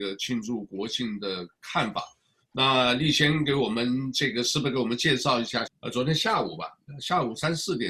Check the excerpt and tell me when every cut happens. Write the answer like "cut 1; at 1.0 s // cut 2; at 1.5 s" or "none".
cut 1; at 5.7 s